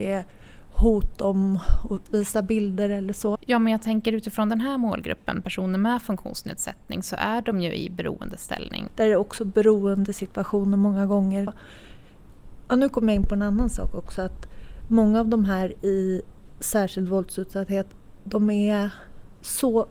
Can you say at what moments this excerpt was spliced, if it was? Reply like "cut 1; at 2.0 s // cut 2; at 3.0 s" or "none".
cut 1; at 3.4 s // cut 2; at 8.9 s // cut 3; at 11.5 s